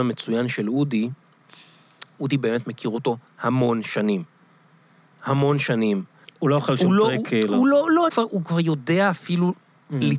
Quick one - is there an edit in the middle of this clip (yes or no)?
yes